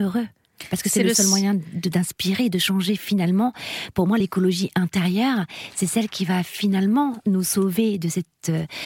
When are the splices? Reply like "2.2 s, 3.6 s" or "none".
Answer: none